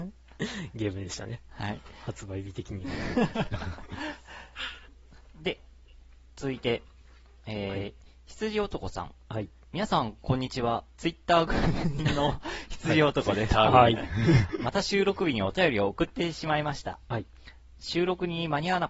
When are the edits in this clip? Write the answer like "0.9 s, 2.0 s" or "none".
none